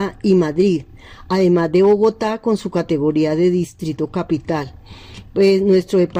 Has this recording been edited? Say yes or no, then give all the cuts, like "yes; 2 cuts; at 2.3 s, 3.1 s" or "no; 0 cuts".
no; 0 cuts